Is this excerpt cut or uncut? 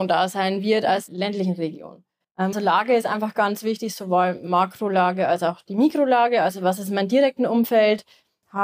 cut